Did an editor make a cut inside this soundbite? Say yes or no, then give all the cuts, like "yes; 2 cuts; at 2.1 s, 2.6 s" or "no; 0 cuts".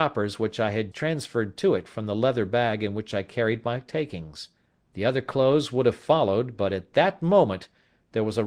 yes; 2 cuts; at 0.9 s, 4.7 s